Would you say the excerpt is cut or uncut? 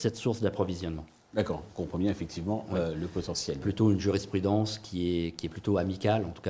cut